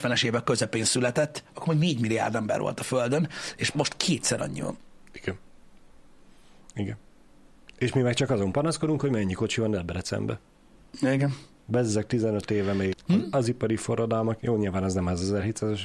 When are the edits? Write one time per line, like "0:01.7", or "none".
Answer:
0:12.9

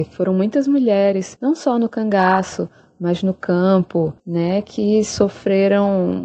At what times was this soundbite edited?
0:04.2

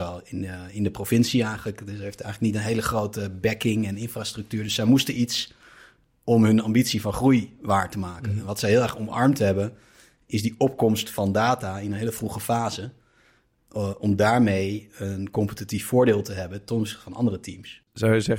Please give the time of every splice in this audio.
none

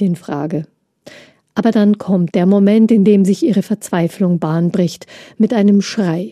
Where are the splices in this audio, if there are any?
0:02.3

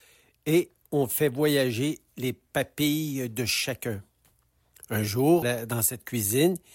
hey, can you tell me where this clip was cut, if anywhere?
0:05.4

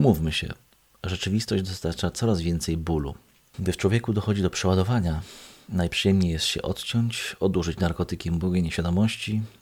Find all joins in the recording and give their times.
0:03.5

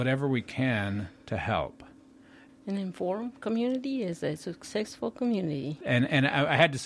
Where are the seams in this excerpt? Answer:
0:02.5
0:05.8

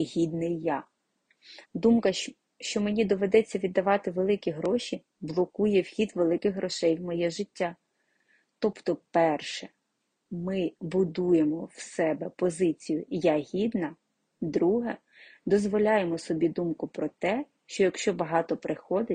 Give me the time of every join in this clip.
0:01.6

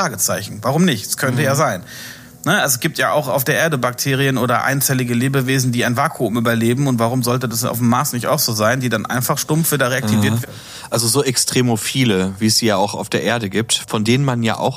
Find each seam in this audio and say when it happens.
0:10.4

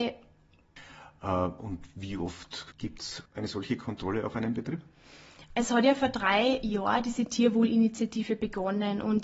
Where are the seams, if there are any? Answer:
0:03.3

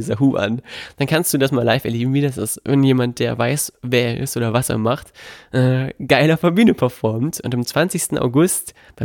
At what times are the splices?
none

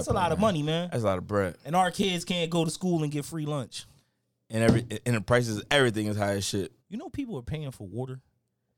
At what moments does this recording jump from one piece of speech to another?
0:06.8

